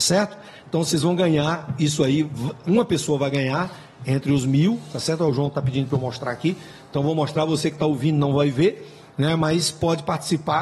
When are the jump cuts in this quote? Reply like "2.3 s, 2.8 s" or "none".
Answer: none